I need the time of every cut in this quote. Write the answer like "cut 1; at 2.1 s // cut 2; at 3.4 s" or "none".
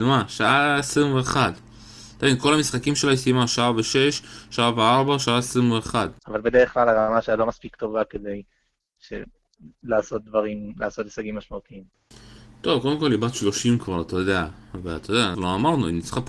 cut 1; at 6.2 s // cut 2; at 15.3 s